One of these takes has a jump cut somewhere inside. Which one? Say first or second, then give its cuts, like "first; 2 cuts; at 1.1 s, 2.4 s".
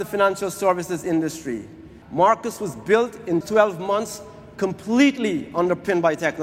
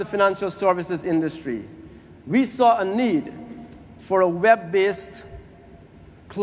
first; 2 cuts; at 2.0 s, 3.4 s